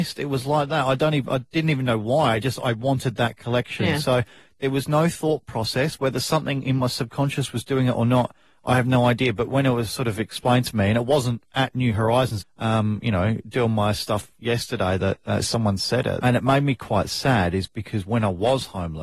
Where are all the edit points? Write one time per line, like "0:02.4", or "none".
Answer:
0:12.4
0:16.2